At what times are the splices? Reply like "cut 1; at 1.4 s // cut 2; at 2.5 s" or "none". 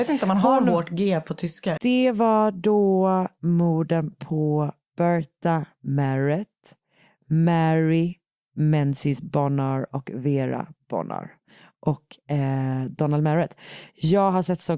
cut 1; at 1.8 s